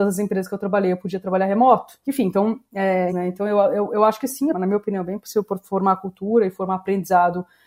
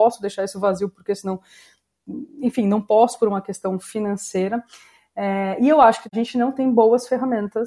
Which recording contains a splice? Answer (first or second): first